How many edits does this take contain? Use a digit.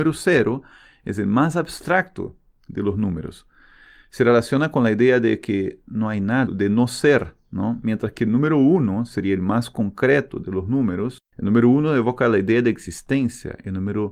1